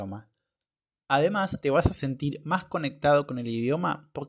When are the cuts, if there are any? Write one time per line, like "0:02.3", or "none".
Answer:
0:01.6